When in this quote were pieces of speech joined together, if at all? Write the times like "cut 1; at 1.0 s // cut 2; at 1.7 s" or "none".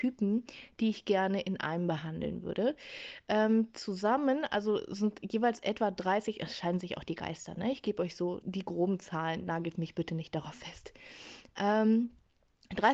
cut 1; at 8.4 s